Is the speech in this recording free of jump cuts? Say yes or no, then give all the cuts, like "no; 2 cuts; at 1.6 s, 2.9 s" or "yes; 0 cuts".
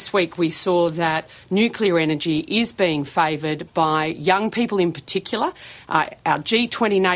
yes; 0 cuts